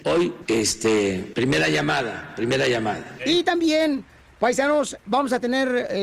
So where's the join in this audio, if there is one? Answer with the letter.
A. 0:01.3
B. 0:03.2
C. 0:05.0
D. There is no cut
B